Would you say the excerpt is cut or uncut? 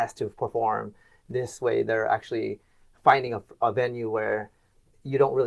uncut